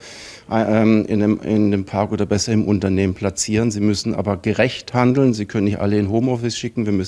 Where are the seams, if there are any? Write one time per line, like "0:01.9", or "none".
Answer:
none